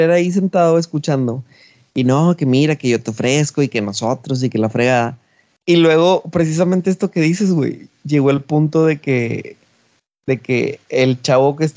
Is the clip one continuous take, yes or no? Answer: yes